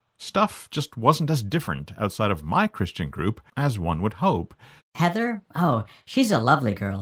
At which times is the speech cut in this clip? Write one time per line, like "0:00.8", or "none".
0:04.8